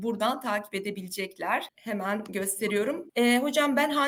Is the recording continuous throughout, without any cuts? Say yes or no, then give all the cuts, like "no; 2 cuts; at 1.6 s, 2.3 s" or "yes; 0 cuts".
no; 2 cuts; at 1.7 s, 3.1 s